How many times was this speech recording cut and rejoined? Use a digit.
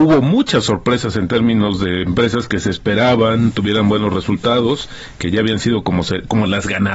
0